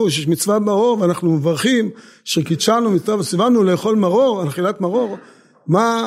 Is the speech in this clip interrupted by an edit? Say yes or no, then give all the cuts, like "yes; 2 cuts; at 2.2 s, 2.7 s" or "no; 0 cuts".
no; 0 cuts